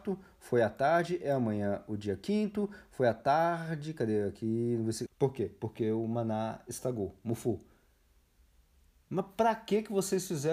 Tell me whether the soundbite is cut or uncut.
cut